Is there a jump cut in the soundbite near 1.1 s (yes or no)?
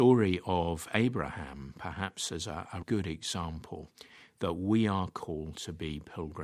no